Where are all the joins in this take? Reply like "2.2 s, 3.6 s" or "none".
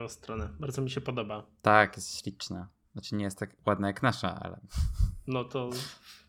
none